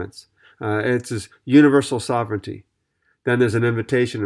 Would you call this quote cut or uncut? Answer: uncut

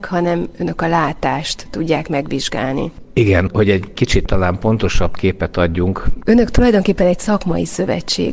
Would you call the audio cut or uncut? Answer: cut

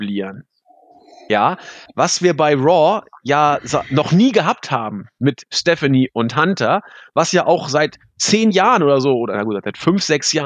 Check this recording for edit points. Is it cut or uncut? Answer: uncut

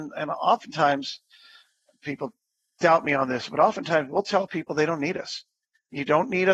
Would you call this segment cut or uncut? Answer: uncut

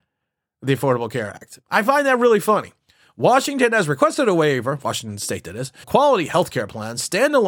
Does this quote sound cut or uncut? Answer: cut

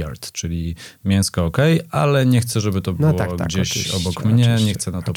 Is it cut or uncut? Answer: uncut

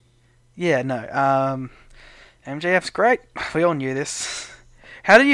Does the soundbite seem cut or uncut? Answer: uncut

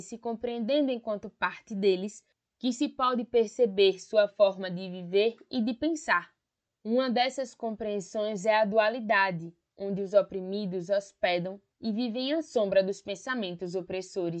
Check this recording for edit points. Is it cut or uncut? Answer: uncut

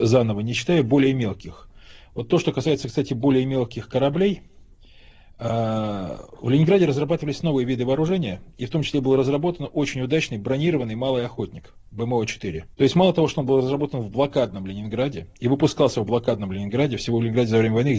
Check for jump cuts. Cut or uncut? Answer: cut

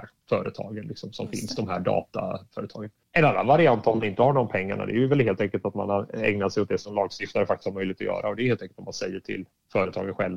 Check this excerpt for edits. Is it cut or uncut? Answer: uncut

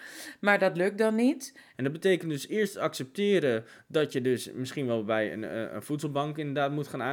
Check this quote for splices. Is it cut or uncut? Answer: cut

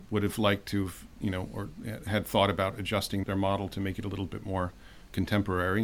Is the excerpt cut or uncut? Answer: cut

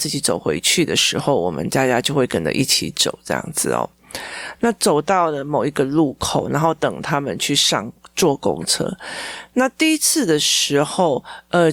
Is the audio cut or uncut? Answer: uncut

